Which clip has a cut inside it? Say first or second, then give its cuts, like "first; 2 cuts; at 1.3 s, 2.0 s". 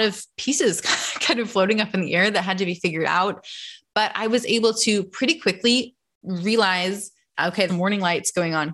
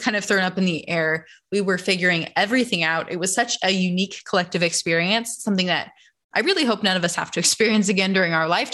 first; 1 cut; at 7.7 s